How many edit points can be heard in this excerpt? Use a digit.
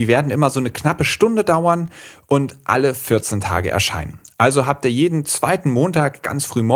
0